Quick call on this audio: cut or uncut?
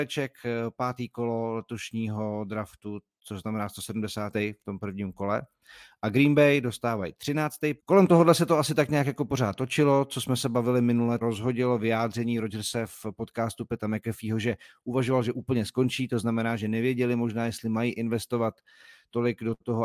cut